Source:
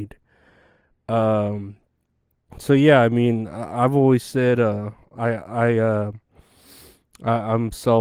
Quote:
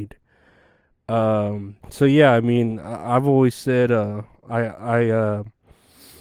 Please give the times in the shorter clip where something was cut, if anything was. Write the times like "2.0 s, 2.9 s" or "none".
1.8 s